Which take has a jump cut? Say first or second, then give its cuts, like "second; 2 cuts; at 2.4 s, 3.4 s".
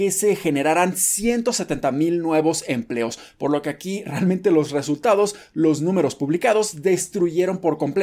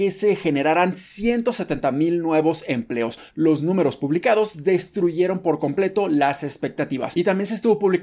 second; 1 cut; at 3.3 s